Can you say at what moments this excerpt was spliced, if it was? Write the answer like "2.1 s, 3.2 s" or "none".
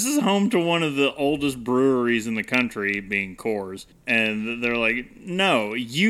3.9 s